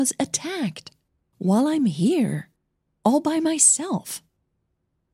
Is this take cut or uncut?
cut